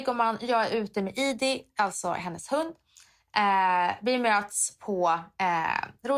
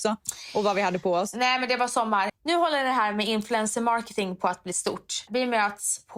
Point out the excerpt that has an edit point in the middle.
second; 2 cuts; at 2.3 s, 5.3 s

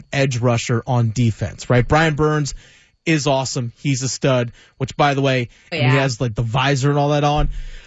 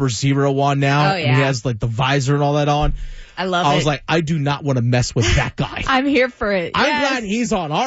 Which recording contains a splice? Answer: first; 1 cut; at 5.7 s

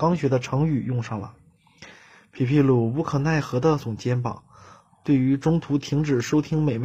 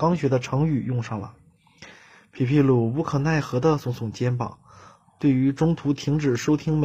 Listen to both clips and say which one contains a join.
first; 1 cut; at 3.8 s

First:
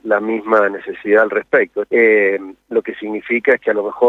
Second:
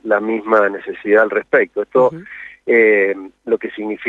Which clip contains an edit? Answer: first; 1 cut; at 1.8 s

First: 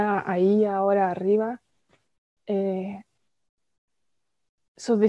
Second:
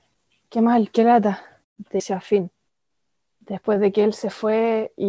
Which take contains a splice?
second; 1 cut; at 1.6 s

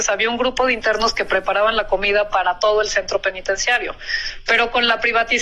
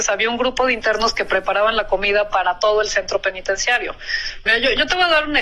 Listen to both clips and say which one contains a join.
second; 1 cut; at 4.5 s

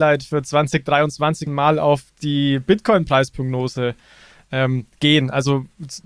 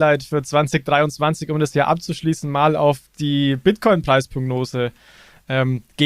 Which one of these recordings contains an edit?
first; 1 cut; at 1.5 s

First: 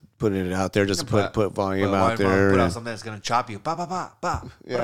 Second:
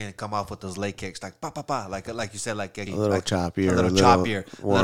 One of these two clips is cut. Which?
second; 1 cut; at 2.9 s

